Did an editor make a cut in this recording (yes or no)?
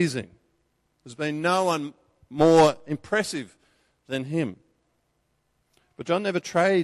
no